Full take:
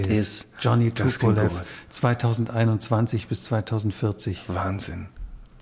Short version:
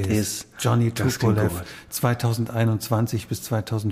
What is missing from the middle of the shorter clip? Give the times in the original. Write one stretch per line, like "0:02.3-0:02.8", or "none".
none